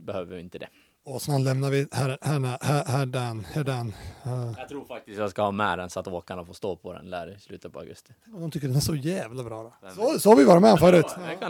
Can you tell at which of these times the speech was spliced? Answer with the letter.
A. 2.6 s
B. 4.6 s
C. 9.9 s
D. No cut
D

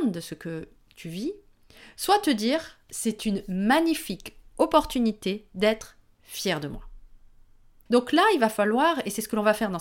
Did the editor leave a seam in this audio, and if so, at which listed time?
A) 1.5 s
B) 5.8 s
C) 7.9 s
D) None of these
C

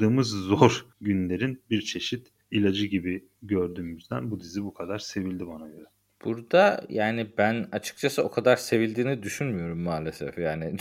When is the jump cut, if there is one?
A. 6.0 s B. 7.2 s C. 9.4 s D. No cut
D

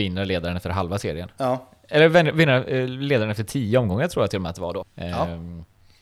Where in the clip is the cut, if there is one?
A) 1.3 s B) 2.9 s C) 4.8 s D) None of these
C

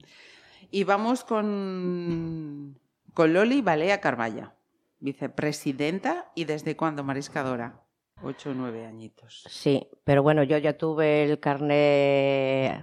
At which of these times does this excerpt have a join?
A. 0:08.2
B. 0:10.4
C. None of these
A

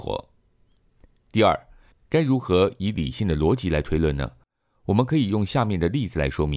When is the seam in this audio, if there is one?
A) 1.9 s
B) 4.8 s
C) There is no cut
A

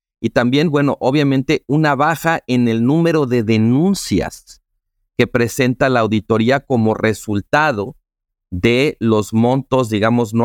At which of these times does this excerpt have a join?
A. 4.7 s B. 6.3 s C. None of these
C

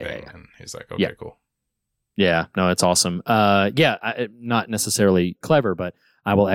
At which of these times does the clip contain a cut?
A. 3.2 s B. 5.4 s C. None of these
B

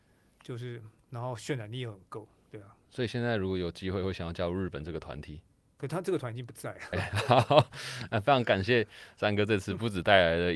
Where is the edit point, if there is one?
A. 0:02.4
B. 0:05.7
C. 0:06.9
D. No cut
C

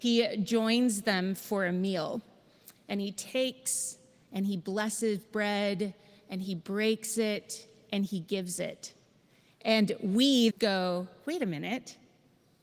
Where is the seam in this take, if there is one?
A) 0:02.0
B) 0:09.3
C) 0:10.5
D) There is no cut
C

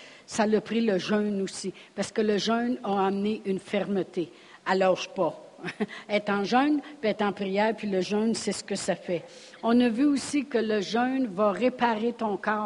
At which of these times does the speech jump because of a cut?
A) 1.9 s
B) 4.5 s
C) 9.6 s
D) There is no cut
D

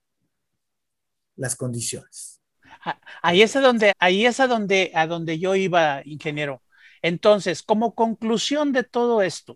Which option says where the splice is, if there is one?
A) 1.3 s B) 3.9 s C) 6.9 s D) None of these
B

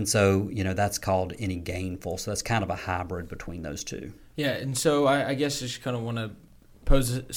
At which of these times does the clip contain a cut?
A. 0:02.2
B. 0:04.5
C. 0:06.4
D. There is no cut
D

